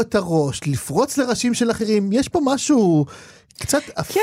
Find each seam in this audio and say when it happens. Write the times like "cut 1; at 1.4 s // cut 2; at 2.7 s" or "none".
none